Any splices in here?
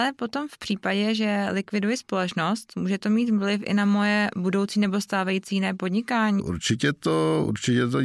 yes; 1 cut; at 6.4 s

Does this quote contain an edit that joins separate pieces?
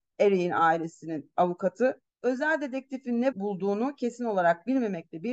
yes; 2 cuts; at 2.1 s, 3.3 s

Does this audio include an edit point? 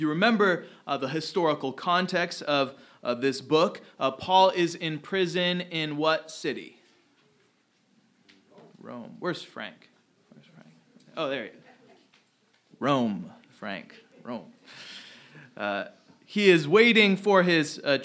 yes; 1 cut; at 8.7 s

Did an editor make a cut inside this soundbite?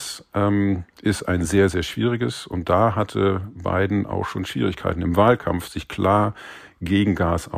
no; 0 cuts

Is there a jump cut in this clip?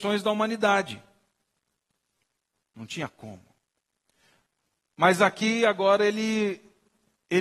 yes; 1 cut; at 2.6 s

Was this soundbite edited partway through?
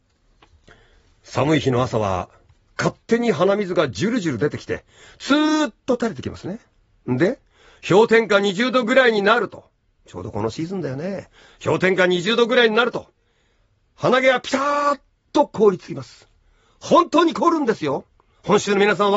no; 0 cuts

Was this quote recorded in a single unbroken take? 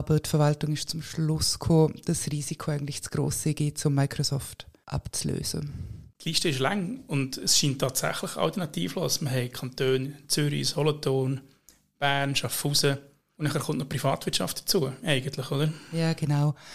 yes; 0 cuts

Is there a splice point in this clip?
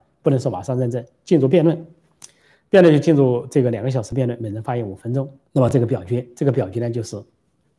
yes; 1 cut; at 5.4 s

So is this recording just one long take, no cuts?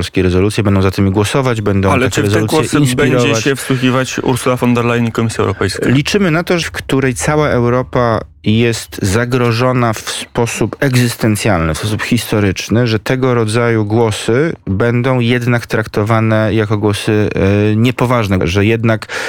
no; 2 cuts; at 6.6 s, 18.4 s

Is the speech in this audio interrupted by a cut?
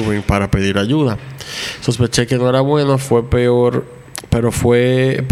no; 0 cuts

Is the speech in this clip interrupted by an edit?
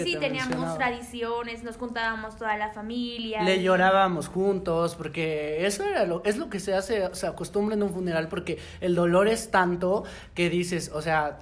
no; 0 cuts

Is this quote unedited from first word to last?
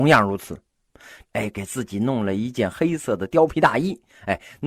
no; 1 cut; at 1.2 s

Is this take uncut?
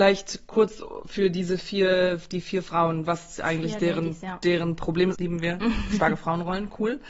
no; 1 cut; at 5.1 s

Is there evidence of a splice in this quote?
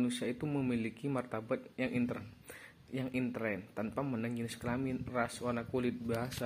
no; 0 cuts

